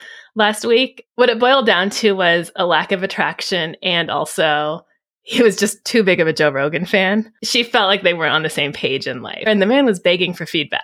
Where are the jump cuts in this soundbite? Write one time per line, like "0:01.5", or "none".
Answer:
0:09.5